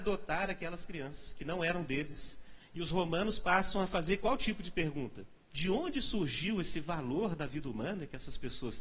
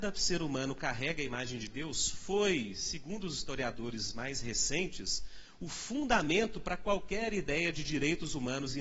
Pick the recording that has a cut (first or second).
first